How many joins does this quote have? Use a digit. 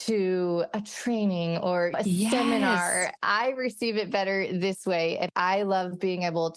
0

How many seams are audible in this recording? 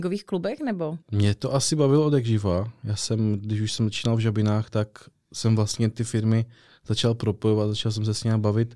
1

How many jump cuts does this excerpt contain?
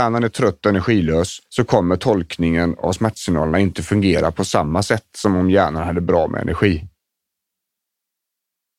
1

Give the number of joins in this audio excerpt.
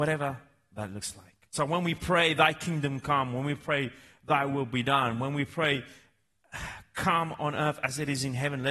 1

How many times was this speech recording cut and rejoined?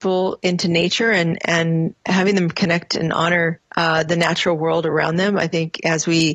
1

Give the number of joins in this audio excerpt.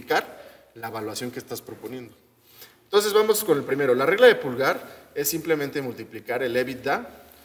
0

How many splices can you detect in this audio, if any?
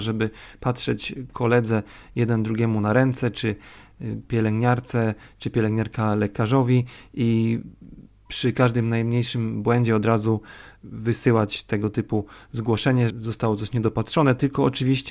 1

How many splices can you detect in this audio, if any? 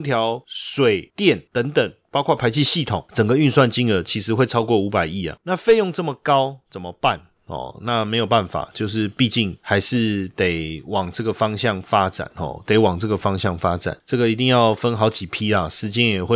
0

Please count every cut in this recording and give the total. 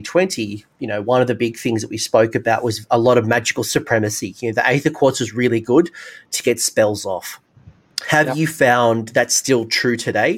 0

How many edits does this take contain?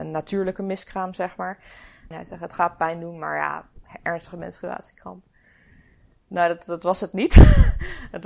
1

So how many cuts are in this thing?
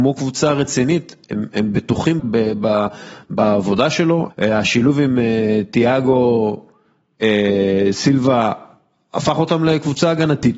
2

